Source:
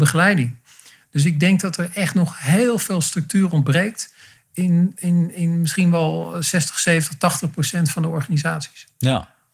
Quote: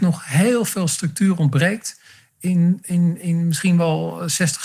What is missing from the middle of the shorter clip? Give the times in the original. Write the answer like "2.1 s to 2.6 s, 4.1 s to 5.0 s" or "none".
none

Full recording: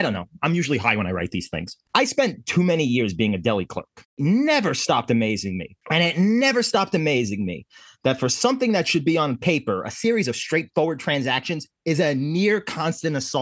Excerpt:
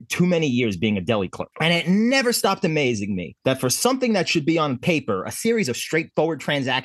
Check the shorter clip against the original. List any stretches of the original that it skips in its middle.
3.9 s to 5.8 s, 7.7 s to 8.0 s

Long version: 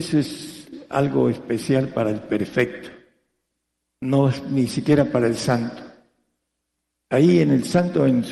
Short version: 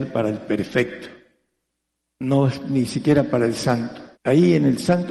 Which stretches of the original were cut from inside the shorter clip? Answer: 6.0 s to 7.0 s

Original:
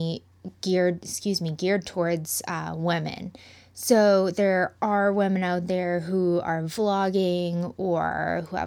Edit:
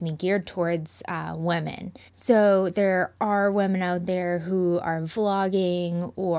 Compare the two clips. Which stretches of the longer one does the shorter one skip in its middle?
3.5 s to 3.7 s

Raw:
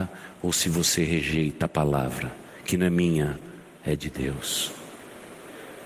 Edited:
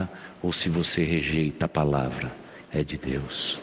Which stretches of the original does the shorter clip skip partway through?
2.6 s to 3.7 s

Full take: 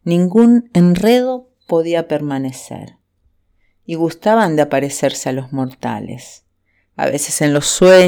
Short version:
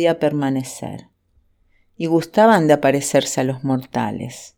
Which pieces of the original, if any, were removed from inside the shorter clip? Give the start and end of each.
none

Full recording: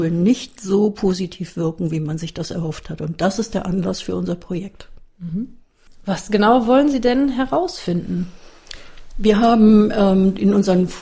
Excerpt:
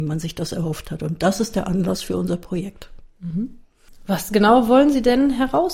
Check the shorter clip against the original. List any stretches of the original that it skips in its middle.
none

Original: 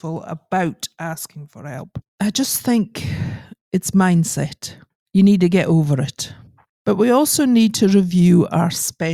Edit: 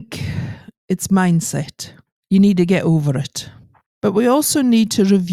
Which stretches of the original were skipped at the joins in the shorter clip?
none

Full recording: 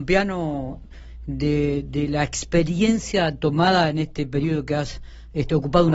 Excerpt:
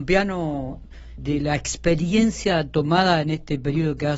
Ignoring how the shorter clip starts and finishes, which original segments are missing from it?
1.2 s to 1.9 s

